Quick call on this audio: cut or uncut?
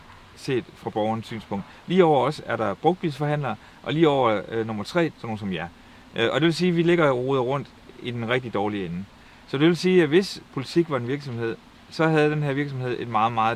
cut